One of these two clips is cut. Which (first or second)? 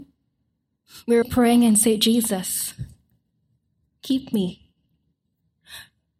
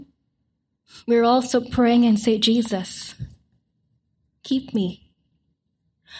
first